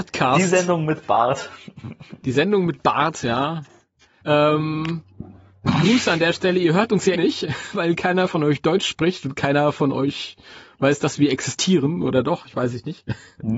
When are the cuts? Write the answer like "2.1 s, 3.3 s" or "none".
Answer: 4.2 s, 7.2 s

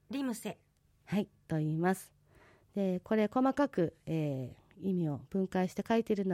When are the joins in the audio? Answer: none

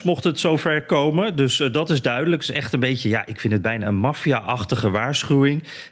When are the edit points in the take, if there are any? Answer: none

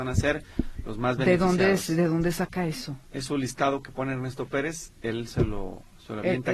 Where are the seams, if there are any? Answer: none

